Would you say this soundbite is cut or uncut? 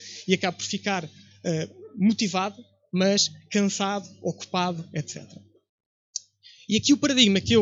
uncut